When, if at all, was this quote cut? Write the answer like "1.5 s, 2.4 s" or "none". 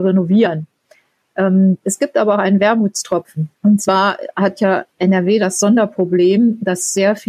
3.5 s